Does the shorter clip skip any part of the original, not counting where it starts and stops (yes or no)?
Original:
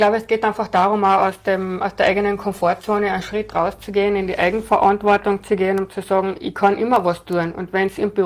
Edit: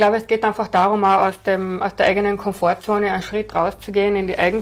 no